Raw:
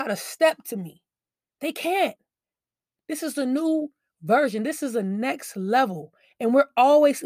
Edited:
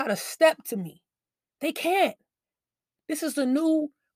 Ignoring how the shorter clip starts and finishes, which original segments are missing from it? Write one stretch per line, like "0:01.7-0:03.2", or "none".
none